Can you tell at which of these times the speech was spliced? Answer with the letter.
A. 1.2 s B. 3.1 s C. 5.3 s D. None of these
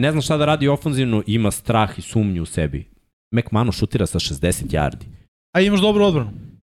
C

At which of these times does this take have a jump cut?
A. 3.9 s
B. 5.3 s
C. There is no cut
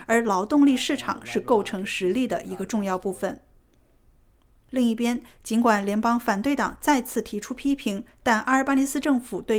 C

